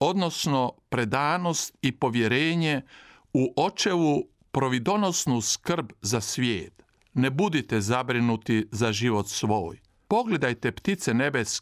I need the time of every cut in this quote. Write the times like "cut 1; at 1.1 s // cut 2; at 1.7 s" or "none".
none